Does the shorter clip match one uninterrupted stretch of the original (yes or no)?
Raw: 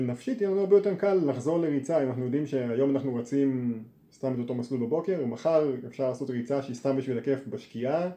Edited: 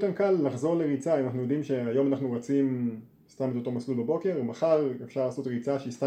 yes